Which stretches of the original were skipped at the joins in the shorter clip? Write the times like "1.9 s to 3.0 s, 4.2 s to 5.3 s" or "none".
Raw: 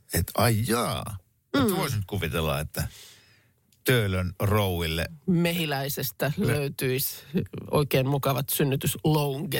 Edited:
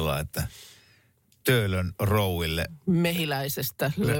none